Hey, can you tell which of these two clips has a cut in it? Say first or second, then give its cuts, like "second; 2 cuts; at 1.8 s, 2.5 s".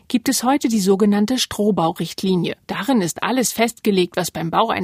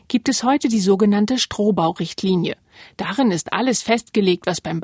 first; 1 cut; at 2.6 s